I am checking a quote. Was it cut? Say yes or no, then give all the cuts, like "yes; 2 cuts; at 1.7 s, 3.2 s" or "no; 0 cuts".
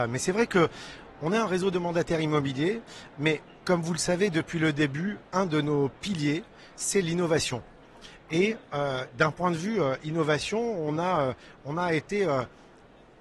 no; 0 cuts